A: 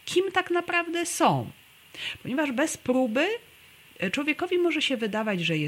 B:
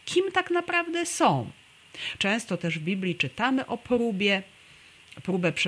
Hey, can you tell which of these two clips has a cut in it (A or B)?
B